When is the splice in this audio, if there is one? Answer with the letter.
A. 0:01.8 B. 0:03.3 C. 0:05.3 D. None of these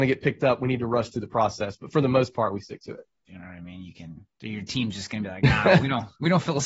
B